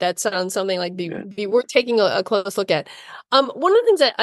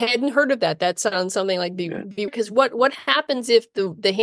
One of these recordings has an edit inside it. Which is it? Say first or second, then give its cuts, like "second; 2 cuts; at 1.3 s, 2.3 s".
second; 1 cut; at 2.3 s